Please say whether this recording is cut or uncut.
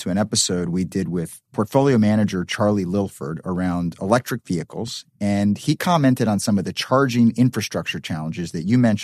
uncut